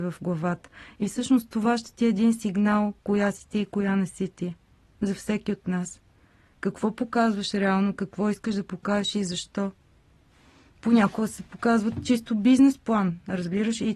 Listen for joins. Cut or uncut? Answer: uncut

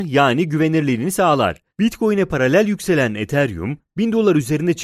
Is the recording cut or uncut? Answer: cut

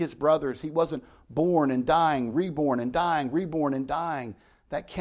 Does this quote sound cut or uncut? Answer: uncut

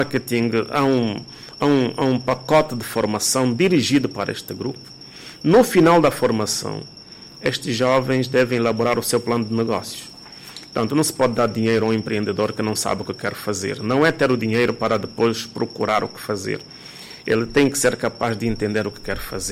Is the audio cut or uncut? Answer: uncut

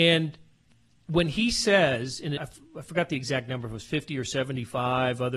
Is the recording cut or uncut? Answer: cut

